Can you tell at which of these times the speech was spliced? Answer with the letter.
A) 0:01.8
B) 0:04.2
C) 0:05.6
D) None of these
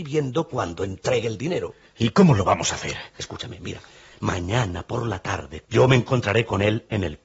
C